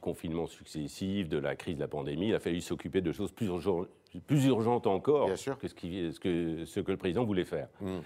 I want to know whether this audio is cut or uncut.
uncut